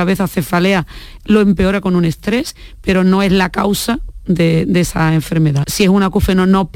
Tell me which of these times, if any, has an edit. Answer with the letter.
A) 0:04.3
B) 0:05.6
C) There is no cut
B